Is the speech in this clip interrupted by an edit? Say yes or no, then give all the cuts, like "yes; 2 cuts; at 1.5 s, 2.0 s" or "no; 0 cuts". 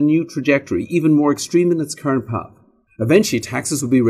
yes; 1 cut; at 2.9 s